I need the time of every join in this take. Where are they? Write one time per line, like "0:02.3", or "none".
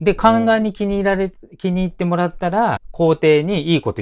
0:02.8